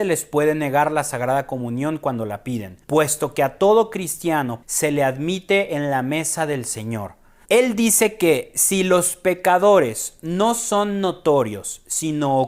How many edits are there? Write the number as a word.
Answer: three